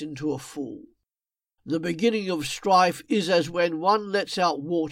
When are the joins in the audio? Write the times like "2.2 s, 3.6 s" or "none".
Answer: 1.6 s